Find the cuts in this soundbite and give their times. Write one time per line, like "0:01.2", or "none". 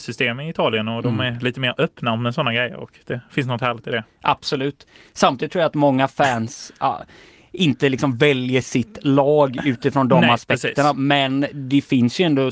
none